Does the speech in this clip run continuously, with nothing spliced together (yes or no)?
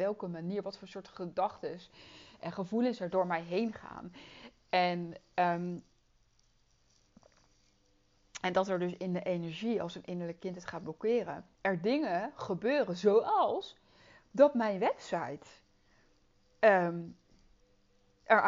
yes